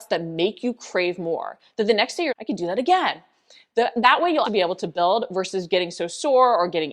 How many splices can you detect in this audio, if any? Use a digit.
2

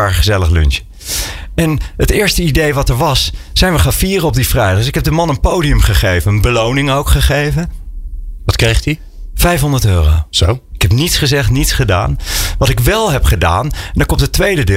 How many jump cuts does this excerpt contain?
1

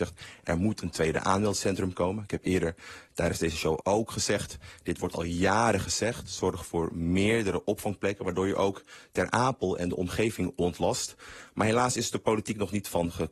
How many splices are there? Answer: 1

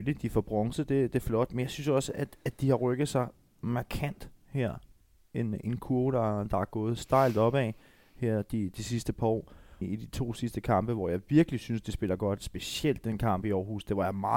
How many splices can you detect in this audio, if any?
1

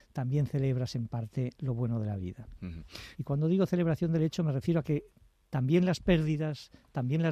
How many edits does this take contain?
1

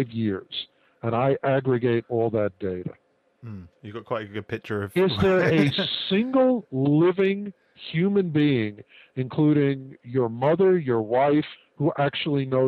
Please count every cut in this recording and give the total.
1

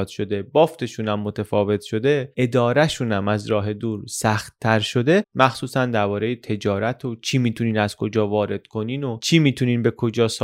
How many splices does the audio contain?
1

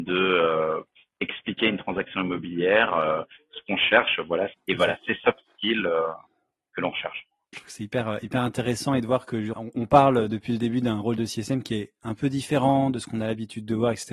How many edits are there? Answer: 3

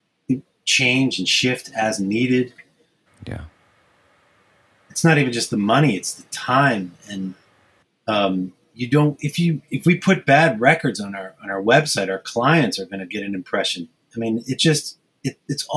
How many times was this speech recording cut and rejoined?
1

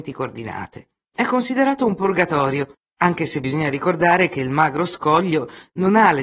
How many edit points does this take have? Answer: 1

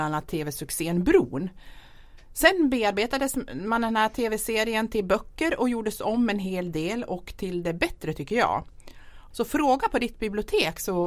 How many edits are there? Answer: 1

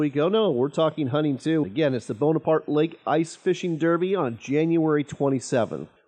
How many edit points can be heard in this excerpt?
1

